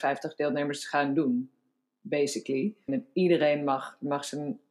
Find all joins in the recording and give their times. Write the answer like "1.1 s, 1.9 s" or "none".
2.9 s